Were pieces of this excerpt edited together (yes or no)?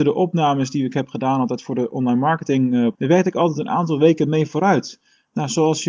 yes